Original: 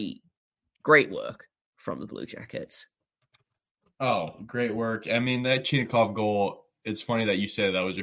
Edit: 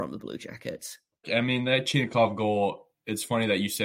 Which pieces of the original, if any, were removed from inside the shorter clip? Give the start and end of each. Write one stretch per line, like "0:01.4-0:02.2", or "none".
0:03.1-0:05.0